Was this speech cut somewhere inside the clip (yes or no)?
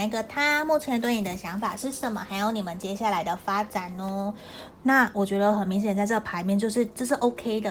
yes